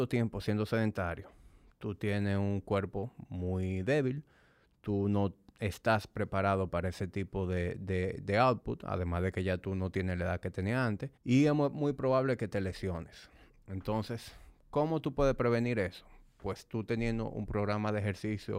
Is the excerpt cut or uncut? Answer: cut